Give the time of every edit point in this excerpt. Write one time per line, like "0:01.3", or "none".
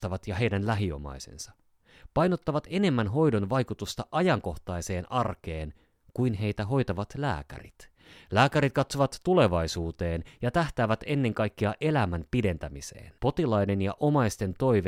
0:13.2

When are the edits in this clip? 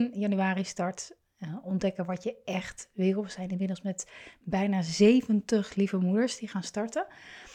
none

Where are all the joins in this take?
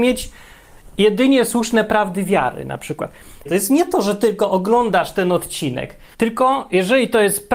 0:03.5
0:06.1

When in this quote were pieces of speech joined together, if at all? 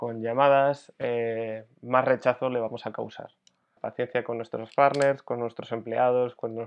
0:03.8

